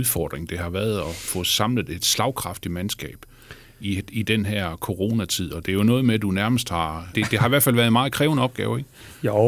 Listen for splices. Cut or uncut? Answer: cut